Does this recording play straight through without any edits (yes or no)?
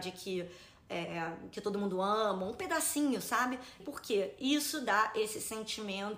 no